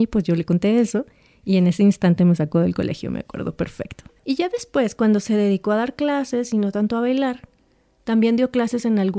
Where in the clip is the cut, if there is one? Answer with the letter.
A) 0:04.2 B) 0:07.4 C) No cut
A